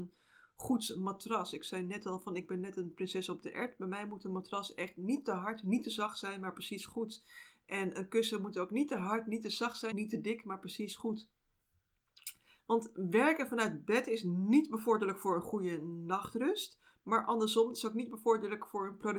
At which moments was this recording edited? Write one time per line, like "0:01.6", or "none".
0:09.9
0:12.6